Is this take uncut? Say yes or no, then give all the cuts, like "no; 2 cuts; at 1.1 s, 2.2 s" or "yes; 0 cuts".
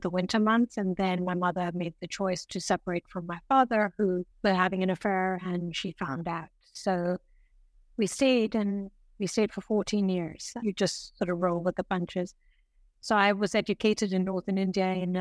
no; 2 cuts; at 4.3 s, 10.6 s